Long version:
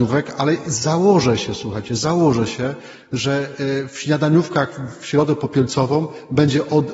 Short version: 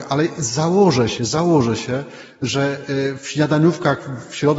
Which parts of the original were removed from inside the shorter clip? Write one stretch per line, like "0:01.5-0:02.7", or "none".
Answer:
0:01.5-0:01.9